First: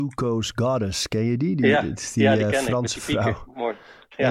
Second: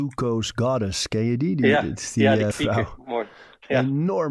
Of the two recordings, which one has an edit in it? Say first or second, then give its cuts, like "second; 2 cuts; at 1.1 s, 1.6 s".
second; 1 cut; at 2.5 s